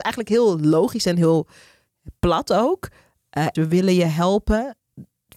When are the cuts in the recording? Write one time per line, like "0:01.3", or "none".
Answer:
0:03.6

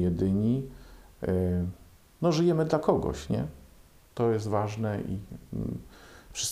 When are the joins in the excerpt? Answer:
none

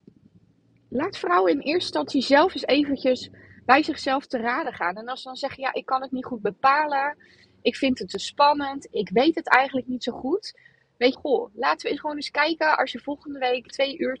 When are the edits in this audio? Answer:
0:11.1

